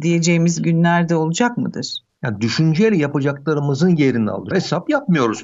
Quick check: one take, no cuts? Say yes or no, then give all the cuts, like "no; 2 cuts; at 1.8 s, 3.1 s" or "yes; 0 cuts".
no; 2 cuts; at 2.2 s, 4.5 s